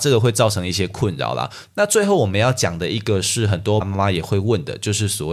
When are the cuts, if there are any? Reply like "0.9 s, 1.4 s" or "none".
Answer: 1.6 s, 3.8 s